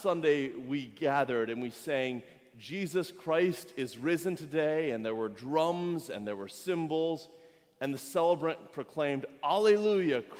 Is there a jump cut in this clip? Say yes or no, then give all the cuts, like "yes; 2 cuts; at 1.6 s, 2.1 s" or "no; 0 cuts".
no; 0 cuts